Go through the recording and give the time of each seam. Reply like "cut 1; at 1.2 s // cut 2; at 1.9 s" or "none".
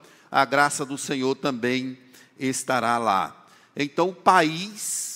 none